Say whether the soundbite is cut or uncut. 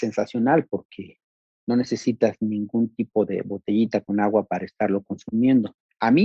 uncut